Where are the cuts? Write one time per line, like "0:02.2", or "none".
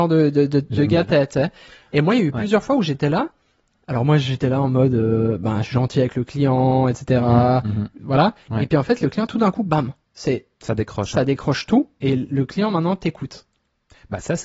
0:08.0

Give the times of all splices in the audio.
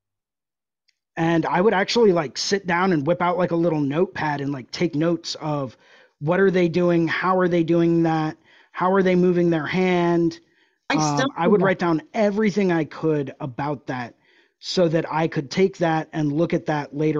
none

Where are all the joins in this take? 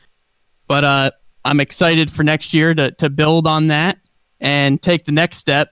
none

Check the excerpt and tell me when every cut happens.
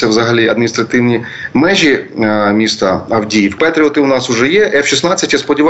0:03.6

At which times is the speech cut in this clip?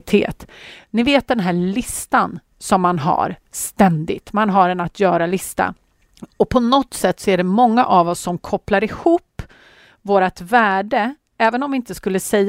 none

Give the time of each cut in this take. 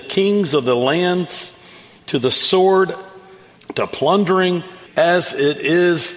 0:03.6
0:04.9

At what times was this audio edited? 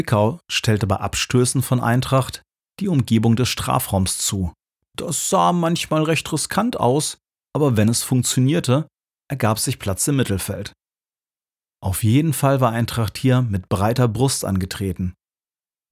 0:04.9

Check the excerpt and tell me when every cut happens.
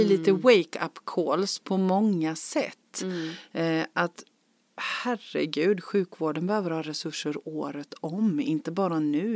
none

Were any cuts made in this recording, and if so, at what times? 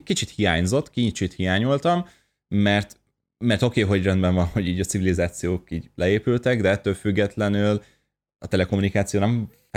none

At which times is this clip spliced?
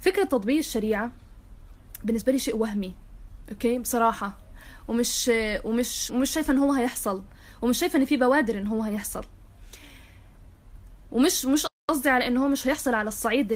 0:06.1

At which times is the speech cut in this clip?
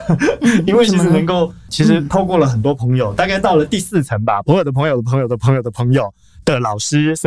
0:01.7

